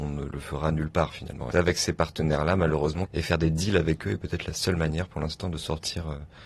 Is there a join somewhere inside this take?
yes; 2 cuts; at 1.5 s, 3.1 s

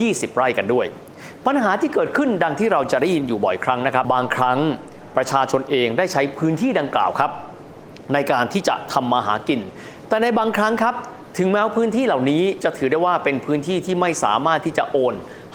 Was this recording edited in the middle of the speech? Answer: yes; 1 cut; at 4.0 s

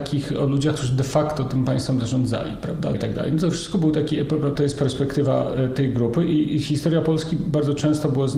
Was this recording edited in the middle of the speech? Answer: yes; 2 cuts; at 2.9 s, 4.6 s

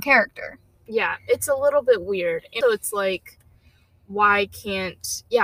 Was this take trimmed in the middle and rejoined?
yes; 1 cut; at 2.6 s

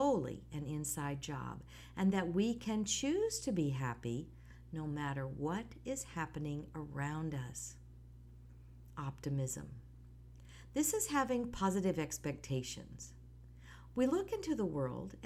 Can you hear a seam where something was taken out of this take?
no; 0 cuts

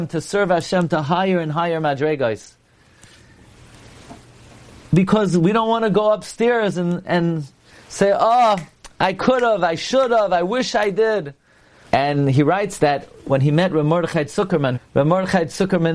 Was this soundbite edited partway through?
yes; 2 cuts; at 11.8 s, 14.7 s

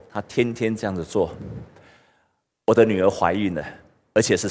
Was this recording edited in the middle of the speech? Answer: yes; 1 cut; at 1.8 s

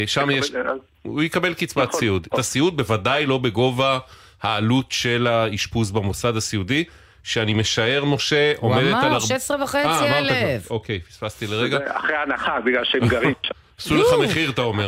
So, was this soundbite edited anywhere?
yes; 1 cut; at 2.3 s

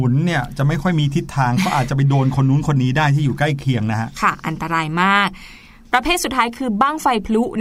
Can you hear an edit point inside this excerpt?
no; 0 cuts

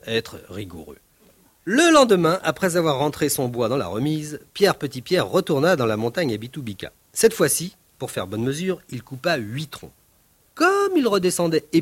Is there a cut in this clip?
no; 0 cuts

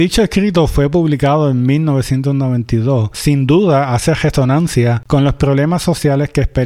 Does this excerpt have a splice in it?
yes; 1 cut; at 3.1 s

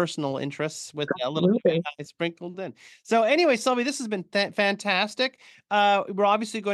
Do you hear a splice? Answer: no; 0 cuts

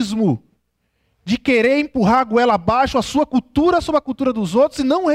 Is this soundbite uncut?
yes; 0 cuts

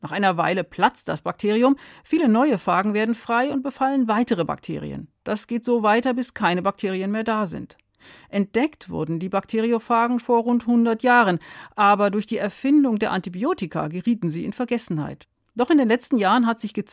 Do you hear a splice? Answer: yes; 1 cut; at 10.2 s

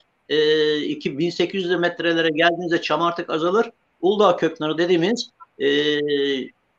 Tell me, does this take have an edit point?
no; 0 cuts

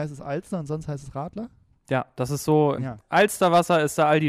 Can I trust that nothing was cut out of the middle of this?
no; 1 cut; at 2.8 s

